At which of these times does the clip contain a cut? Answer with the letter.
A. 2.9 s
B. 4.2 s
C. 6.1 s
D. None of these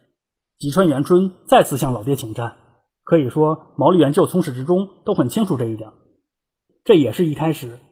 A